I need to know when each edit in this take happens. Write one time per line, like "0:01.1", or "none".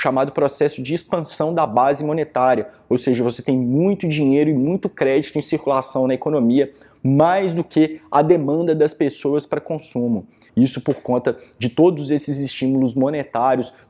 0:10.5